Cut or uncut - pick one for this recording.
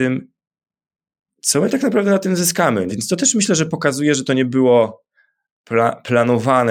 cut